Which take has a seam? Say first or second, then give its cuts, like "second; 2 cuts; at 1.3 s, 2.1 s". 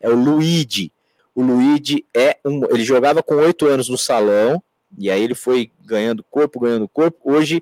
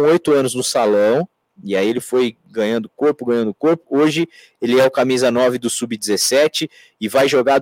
first; 1 cut; at 1.2 s